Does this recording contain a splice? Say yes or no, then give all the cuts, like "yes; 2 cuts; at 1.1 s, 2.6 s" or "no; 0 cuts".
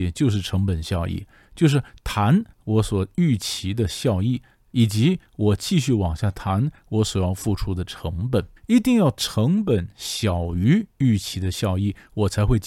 yes; 1 cut; at 8.6 s